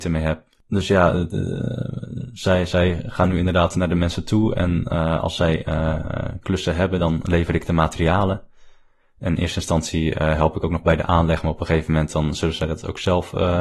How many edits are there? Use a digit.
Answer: 0